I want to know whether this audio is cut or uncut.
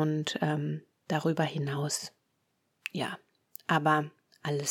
uncut